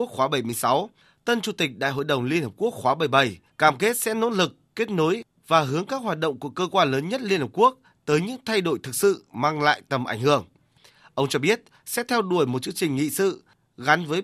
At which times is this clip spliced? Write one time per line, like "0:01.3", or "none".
0:03.5